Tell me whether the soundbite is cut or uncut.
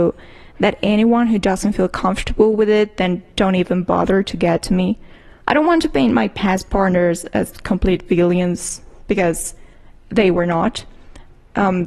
cut